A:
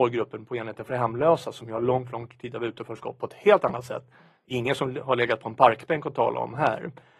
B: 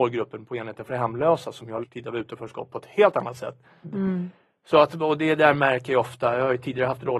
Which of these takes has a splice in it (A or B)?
B